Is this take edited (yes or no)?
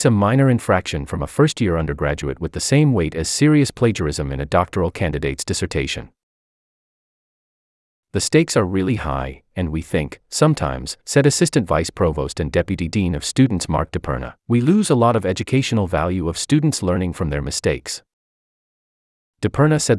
yes